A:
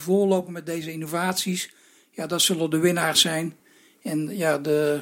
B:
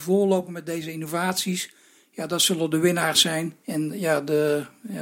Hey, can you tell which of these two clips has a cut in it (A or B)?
B